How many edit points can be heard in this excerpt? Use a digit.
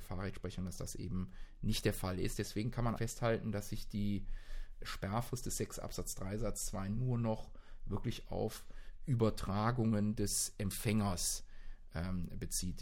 2